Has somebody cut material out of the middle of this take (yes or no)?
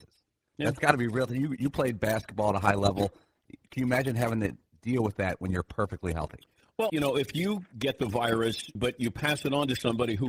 yes